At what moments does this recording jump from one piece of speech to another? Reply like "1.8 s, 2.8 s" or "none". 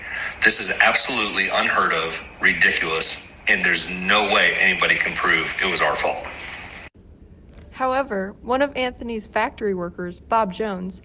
none